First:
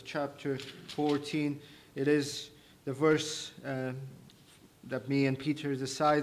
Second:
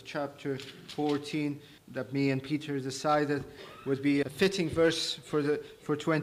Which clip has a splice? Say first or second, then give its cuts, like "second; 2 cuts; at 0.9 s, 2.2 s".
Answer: second; 2 cuts; at 1.8 s, 4.2 s